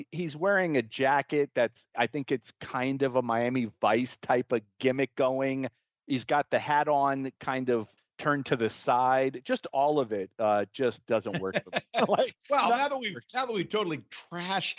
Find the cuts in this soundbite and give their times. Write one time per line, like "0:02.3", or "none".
none